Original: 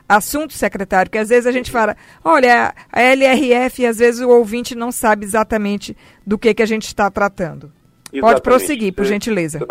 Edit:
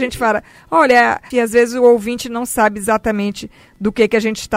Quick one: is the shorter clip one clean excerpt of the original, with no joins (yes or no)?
no